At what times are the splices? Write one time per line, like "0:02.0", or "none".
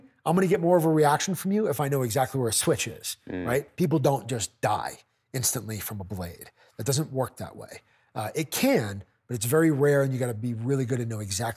0:03.7